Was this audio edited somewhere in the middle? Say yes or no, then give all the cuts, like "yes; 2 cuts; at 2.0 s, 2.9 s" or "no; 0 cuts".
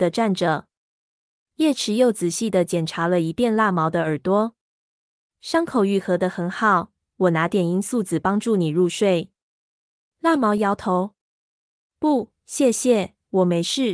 yes; 2 cuts; at 7.0 s, 10.6 s